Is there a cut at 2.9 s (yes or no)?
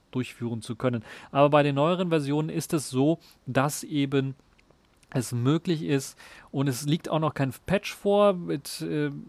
no